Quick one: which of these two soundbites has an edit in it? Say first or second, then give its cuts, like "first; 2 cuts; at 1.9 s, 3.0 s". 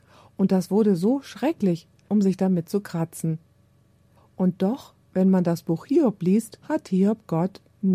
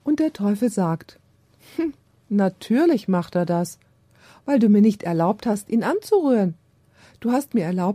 first; 3 cuts; at 2.1 s, 4.2 s, 6.6 s